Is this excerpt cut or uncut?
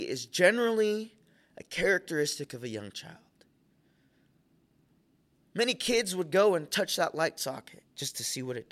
uncut